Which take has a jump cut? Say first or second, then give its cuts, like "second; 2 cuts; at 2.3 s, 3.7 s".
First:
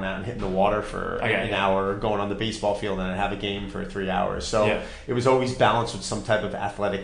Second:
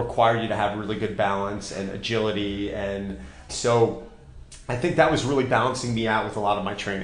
second; 1 cut; at 3.5 s